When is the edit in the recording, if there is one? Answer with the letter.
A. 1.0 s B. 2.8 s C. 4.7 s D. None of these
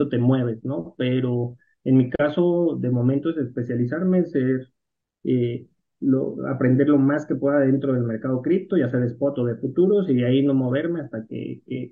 D